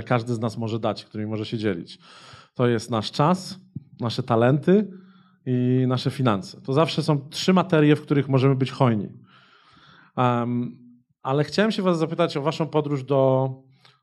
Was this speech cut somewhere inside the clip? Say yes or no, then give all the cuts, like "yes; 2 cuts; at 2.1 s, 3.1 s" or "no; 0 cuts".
no; 0 cuts